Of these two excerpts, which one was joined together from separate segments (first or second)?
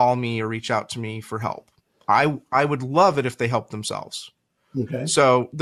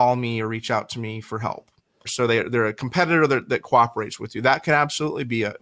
second